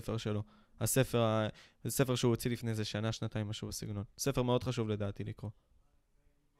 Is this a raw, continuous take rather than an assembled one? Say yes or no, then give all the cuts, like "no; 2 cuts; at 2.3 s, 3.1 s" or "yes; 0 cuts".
yes; 0 cuts